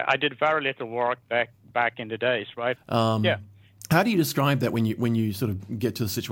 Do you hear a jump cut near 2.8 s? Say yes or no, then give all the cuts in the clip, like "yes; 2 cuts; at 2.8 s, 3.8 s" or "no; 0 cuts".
yes; 1 cut; at 2.8 s